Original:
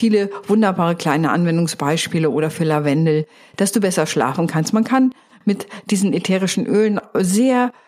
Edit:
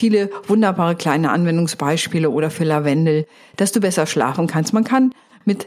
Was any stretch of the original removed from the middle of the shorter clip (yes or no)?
no